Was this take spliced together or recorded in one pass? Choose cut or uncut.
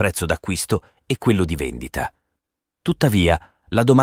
cut